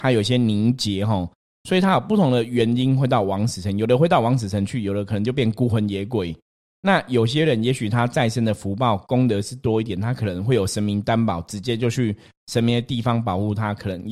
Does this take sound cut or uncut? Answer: uncut